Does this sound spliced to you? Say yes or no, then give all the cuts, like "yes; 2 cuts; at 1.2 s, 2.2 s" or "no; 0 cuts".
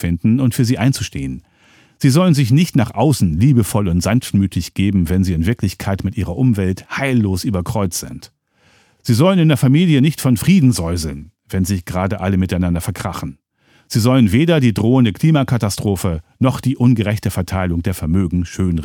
no; 0 cuts